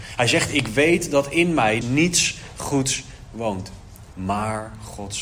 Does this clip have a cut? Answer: yes; 2 cuts; at 1.8 s, 4.1 s

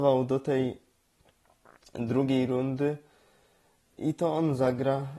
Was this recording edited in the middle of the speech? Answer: yes; 1 cut; at 3.9 s

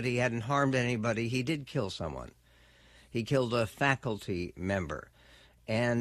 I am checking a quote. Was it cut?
no; 0 cuts

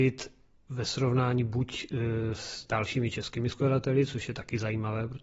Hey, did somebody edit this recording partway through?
no; 0 cuts

